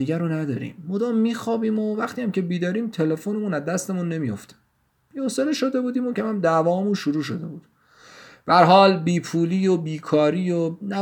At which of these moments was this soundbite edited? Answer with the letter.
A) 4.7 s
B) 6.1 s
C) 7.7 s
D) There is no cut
B